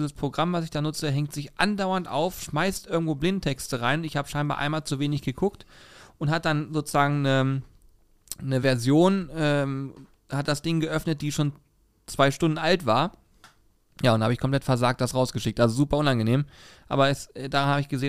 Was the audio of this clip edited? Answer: no; 0 cuts

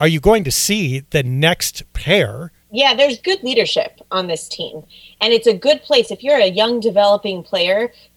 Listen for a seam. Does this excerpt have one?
yes; 1 cut; at 2.6 s

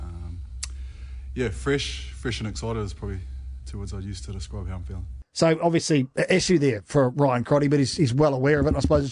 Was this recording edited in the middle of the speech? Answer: no; 0 cuts

